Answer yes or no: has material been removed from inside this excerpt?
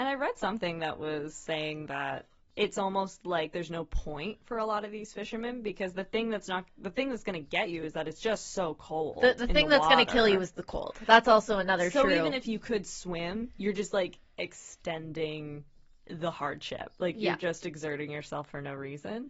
no